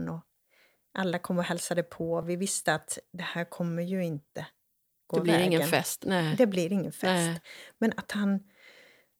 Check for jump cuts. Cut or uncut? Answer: uncut